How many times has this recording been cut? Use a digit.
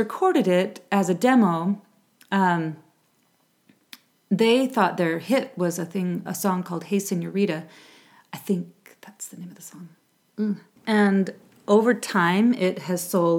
2